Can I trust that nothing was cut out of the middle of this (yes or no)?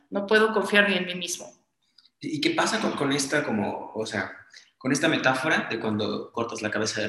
yes